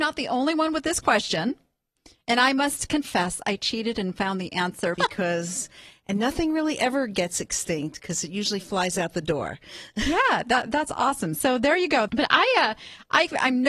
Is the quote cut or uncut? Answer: cut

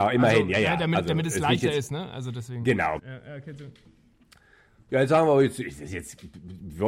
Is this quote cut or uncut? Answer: cut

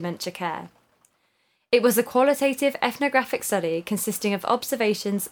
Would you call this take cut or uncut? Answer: uncut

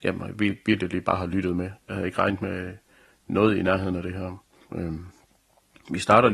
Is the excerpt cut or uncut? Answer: cut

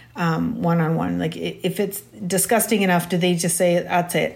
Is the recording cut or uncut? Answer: uncut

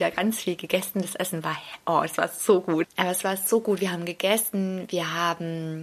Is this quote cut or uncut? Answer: cut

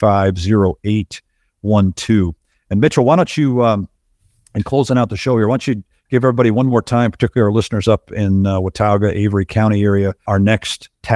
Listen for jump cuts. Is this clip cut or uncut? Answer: cut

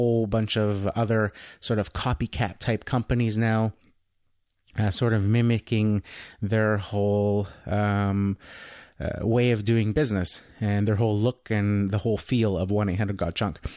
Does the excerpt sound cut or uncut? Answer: uncut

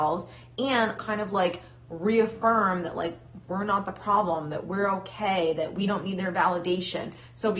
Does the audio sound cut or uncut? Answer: cut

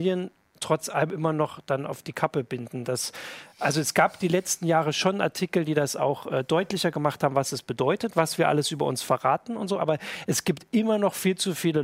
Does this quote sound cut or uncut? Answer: uncut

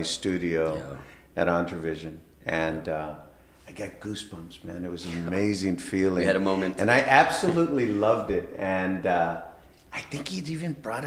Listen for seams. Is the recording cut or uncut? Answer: uncut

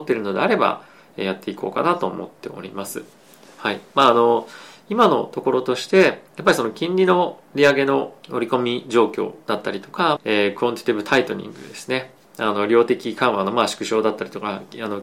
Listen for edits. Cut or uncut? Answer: cut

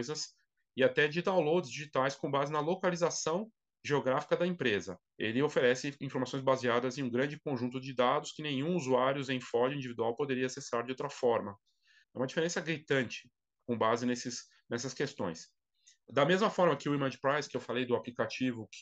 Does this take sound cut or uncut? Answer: cut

